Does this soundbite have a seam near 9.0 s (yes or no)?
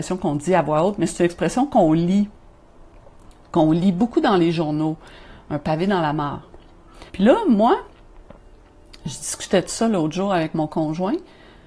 no